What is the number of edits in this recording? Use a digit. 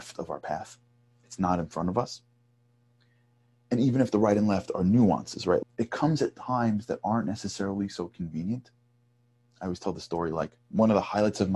1